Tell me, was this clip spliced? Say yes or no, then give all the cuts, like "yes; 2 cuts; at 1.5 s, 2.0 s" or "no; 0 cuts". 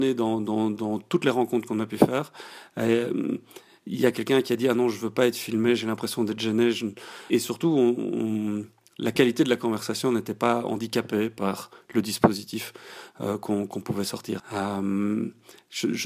yes; 2 cuts; at 7.3 s, 14.4 s